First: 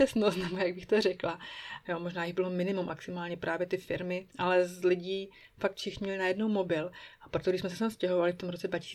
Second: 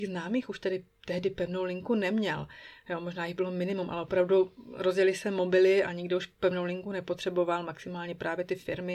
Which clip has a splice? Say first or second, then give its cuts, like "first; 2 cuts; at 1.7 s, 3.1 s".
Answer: first; 3 cuts; at 1.8 s, 2.9 s, 4.3 s